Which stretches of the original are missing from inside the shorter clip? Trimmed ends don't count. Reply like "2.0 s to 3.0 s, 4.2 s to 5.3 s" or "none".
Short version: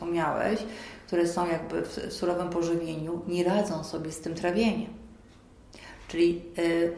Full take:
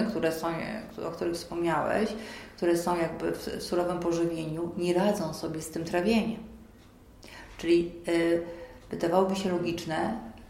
none